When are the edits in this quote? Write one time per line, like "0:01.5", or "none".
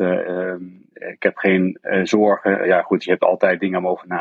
none